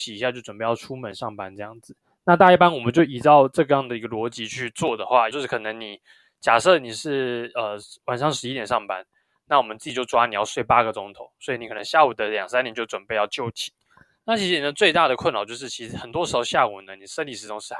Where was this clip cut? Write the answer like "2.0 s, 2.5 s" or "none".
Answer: 5.3 s

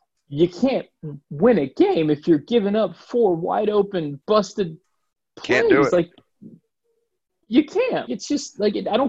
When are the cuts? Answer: 4.2 s, 8.1 s

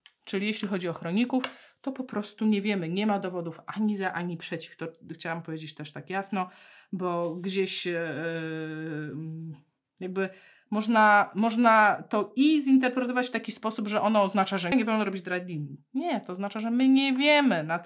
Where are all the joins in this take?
14.7 s

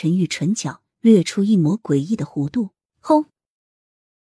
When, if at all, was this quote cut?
2.9 s

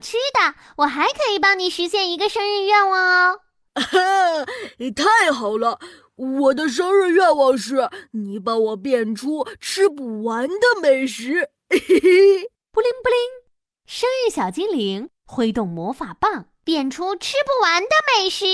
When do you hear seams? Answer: 12.6 s, 16.6 s

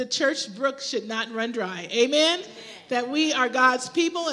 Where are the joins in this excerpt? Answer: none

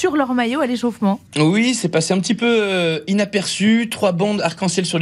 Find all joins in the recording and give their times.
1.3 s

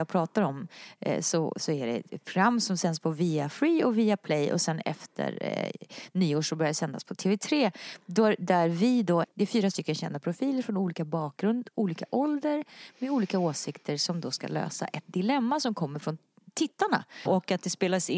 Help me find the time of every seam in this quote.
9.2 s, 17.3 s

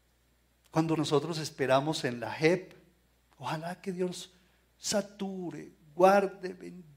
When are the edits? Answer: 1.0 s

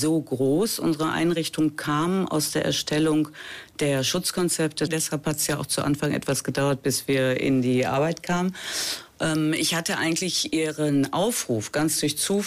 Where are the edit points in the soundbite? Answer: 4.9 s

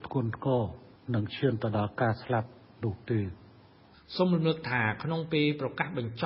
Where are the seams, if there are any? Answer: none

